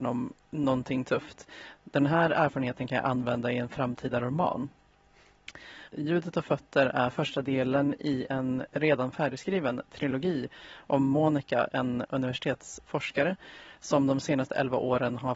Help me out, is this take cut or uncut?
cut